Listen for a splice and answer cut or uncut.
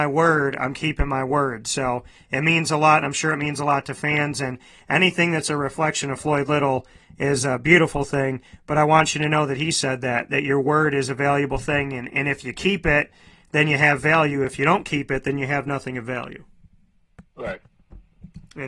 uncut